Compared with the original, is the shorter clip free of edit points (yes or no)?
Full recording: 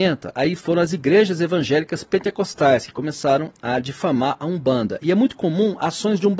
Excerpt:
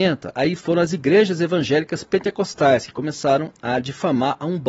yes